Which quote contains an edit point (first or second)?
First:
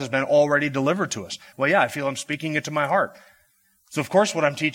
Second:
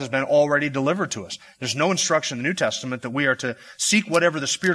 first